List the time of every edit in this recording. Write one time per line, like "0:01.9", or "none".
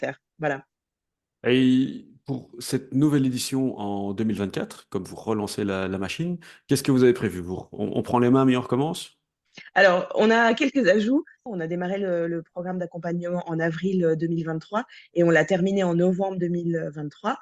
0:11.5